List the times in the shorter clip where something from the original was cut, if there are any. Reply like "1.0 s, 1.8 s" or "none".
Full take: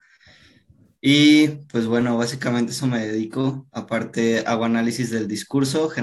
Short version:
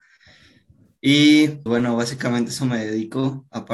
1.7 s